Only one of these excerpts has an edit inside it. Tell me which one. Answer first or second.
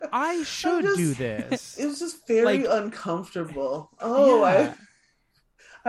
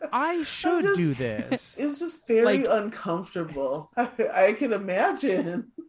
second